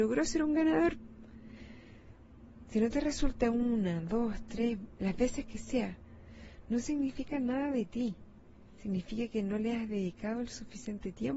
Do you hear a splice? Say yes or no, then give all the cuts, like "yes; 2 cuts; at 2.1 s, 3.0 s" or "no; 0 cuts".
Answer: no; 0 cuts